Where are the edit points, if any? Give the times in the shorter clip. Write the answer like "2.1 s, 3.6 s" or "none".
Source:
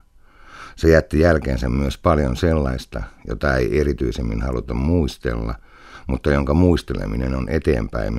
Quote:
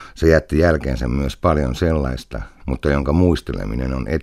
2.6 s